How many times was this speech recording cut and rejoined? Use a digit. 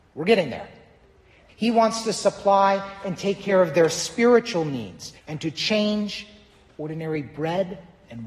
2